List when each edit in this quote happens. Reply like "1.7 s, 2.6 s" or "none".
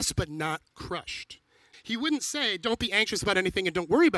1.7 s